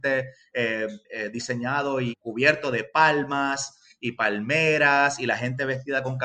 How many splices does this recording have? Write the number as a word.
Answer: two